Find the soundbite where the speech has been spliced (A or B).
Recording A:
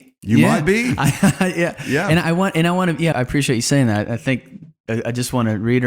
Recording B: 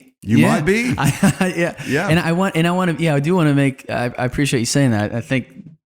A